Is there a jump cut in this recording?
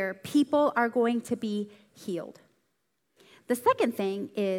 no; 0 cuts

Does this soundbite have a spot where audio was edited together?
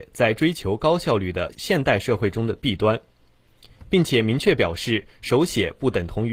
yes; 1 cut; at 1.5 s

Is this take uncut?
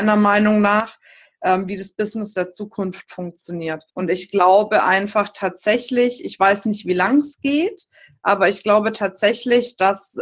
no; 1 cut; at 3.9 s

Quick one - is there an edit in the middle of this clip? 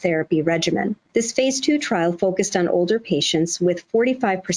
yes; 1 cut; at 1.1 s

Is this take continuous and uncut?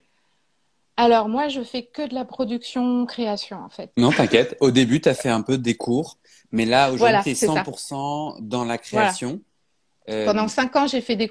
no; 1 cut; at 3.9 s

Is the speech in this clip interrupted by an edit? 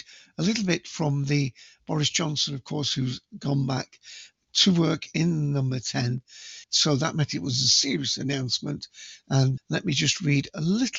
yes; 2 cuts; at 6.6 s, 9.6 s

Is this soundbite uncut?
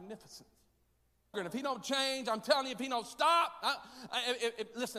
no; 1 cut; at 1.3 s

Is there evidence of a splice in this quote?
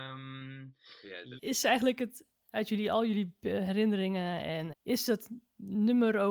yes; 2 cuts; at 1.4 s, 4.7 s

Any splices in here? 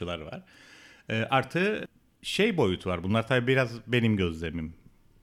no; 0 cuts

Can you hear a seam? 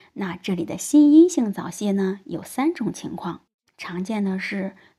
yes; 1 cut; at 3.7 s

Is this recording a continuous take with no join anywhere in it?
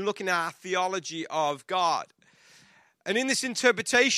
yes; 0 cuts

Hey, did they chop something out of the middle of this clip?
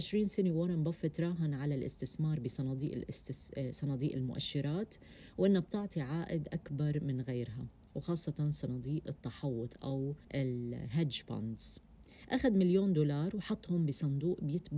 yes; 1 cut; at 10.2 s

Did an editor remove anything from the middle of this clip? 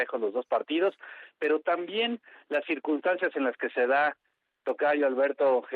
no; 0 cuts

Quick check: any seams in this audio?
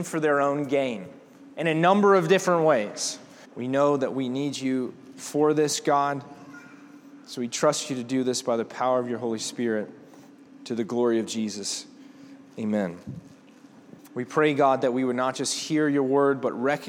yes; 2 cuts; at 3.4 s, 14.0 s

